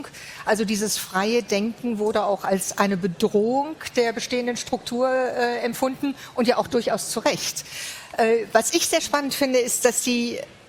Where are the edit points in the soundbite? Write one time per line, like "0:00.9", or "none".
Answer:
none